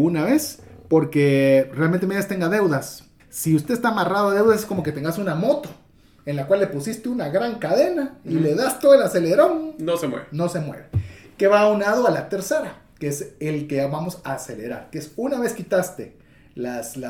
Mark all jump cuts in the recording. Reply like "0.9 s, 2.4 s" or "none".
3.2 s